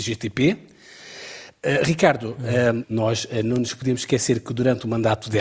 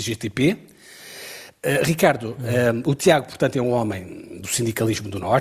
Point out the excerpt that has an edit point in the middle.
first; 1 cut; at 2.8 s

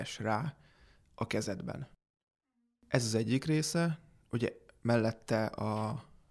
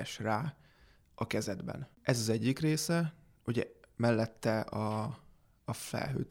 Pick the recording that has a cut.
second; 1 cut; at 1.9 s

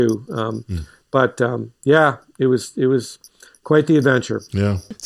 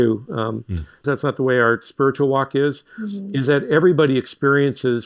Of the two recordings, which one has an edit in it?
second; 1 cut; at 1.0 s

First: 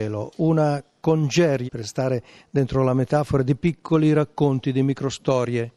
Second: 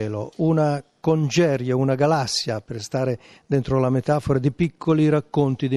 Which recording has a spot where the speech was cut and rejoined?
first; 1 cut; at 1.7 s

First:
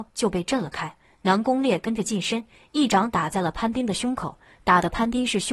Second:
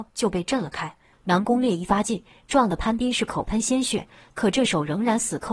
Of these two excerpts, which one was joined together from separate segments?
second; 1 cut; at 1.1 s

